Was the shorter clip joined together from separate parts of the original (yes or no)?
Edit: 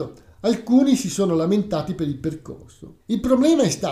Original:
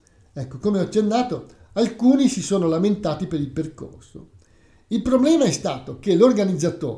yes